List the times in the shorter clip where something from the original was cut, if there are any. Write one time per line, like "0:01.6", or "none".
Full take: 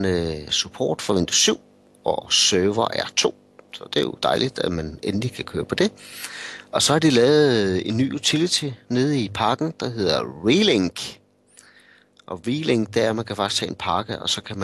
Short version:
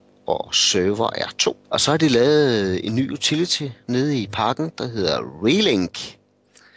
0:01.6

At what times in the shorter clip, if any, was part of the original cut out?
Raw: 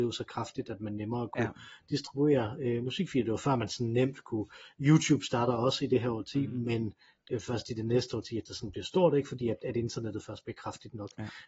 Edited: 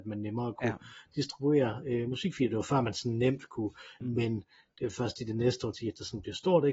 0:04.0

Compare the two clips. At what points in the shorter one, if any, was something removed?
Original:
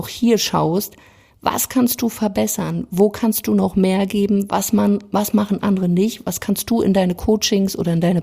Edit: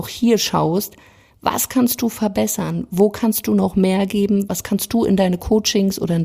0:04.5

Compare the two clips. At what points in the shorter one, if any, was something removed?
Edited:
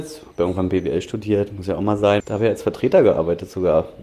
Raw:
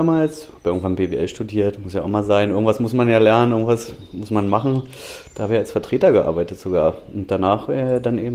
0:02.2

